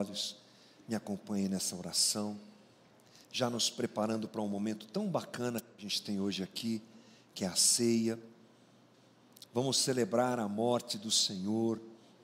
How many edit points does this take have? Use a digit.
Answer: 1